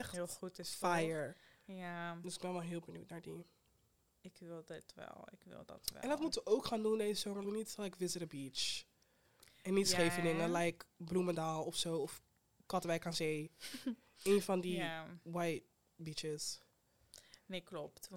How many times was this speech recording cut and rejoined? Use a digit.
1